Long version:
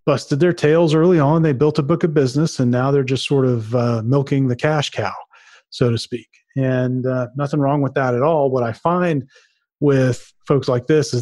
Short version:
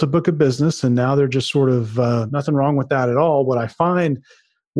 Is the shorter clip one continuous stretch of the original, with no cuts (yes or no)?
no